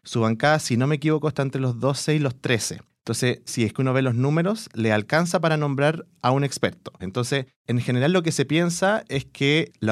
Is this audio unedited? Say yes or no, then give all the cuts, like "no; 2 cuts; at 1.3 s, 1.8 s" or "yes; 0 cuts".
no; 2 cuts; at 3.5 s, 7.0 s